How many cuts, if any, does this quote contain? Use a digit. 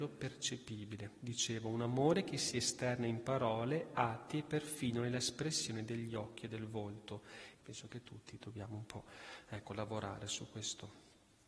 1